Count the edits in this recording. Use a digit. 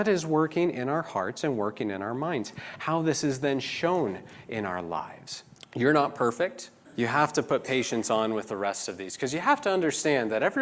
2